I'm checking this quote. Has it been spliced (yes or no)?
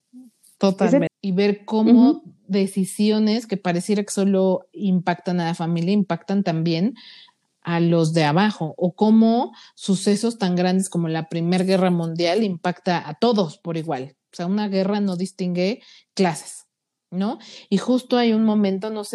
yes